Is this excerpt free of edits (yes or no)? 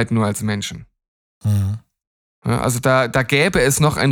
yes